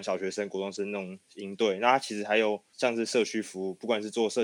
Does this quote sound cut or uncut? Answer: uncut